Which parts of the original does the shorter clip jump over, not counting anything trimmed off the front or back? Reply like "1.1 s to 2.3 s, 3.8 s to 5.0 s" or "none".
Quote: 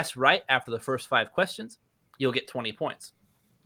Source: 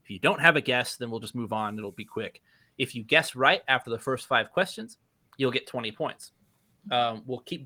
none